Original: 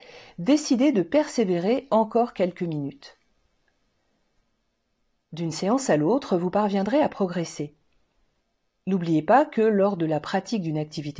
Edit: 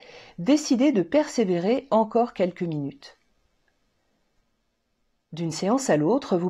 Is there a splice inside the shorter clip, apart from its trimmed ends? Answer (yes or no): no